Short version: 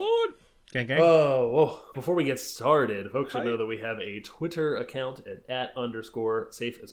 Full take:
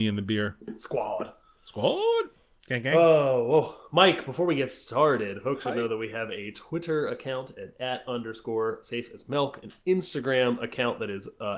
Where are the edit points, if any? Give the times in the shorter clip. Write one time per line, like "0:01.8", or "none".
0:01.9